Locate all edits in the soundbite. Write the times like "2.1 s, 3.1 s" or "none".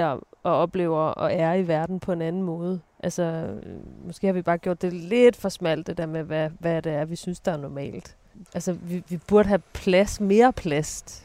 2.9 s, 8.5 s